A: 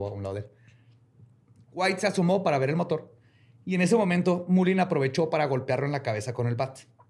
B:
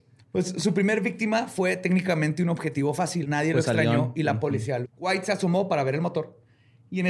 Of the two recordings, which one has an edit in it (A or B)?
B